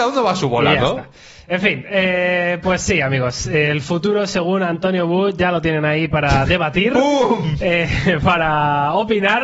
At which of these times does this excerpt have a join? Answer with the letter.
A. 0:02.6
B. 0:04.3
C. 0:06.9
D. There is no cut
D